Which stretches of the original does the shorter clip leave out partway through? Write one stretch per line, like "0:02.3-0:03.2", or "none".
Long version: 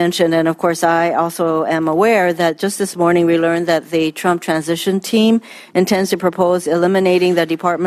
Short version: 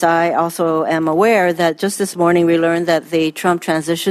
none